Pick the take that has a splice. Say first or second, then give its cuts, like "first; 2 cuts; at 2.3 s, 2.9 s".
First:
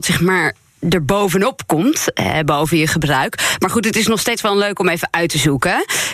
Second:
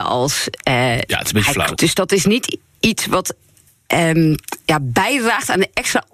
second; 1 cut; at 1.8 s